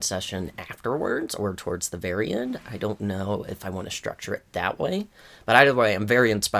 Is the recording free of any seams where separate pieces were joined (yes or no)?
yes